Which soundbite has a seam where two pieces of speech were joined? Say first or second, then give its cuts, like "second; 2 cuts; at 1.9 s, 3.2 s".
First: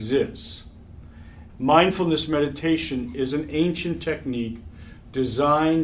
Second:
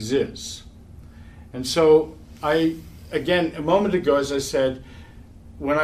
first; 1 cut; at 1.5 s